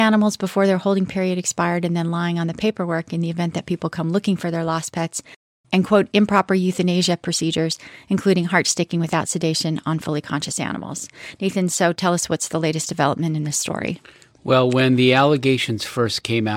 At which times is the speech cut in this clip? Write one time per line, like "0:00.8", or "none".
none